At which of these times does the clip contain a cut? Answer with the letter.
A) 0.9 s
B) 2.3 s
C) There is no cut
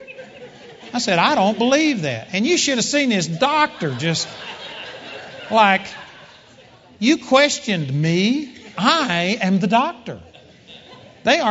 C